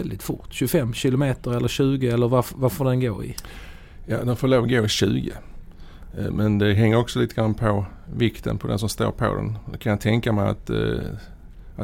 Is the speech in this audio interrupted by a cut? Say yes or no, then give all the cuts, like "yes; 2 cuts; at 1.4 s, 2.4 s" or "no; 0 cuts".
no; 0 cuts